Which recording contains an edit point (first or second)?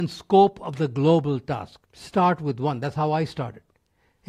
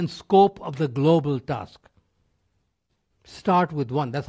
first